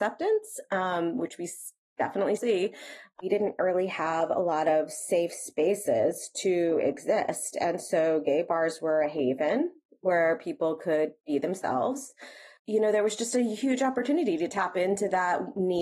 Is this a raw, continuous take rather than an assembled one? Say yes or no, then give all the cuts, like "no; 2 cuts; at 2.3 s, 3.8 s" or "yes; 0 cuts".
no; 2 cuts; at 2.4 s, 12.6 s